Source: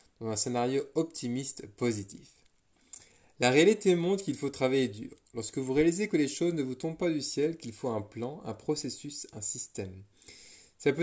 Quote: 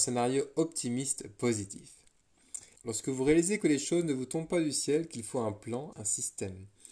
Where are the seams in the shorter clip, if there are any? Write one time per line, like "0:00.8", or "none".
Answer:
0:02.8
0:05.9